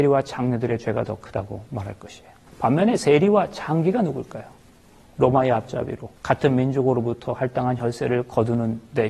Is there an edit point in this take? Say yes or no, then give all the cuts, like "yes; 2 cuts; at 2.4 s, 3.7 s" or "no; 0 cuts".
yes; 2 cuts; at 2.5 s, 6.2 s